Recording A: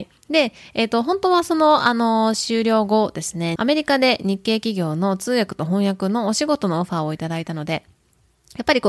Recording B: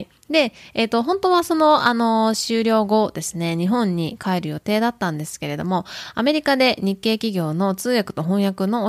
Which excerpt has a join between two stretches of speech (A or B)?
A